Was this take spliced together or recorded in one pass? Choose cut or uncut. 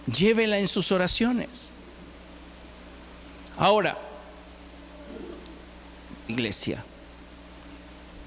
cut